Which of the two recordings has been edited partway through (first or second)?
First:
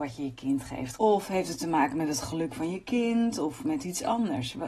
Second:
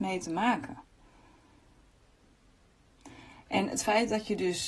first